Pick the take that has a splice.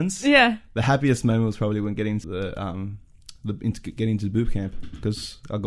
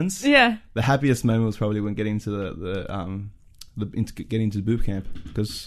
first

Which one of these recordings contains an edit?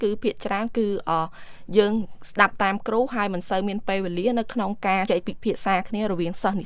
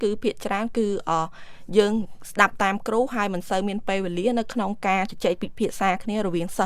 first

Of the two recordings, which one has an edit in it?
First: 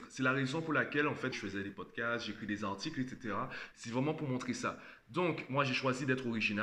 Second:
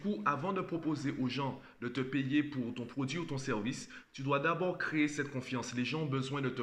first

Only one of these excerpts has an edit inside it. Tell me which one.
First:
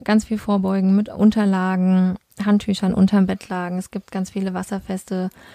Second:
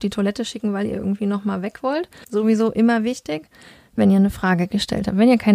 second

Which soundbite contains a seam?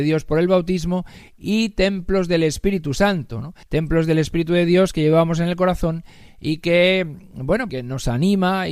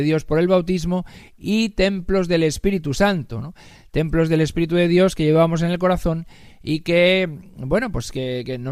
first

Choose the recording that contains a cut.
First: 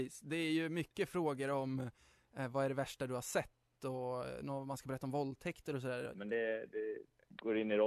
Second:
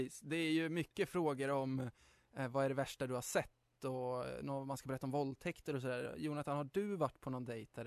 first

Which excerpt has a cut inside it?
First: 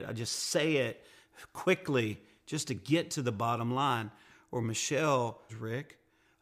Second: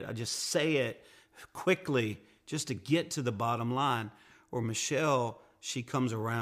first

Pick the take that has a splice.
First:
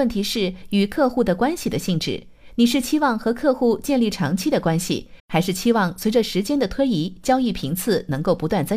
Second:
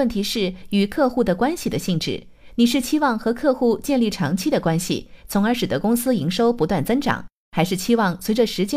first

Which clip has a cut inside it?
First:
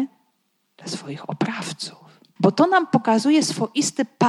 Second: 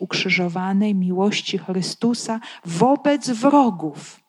first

